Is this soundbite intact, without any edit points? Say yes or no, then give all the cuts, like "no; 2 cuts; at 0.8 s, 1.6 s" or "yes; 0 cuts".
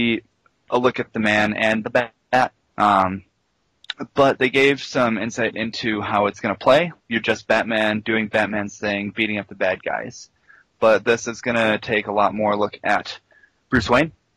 no; 2 cuts; at 2.7 s, 7.0 s